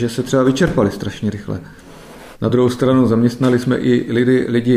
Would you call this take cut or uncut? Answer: cut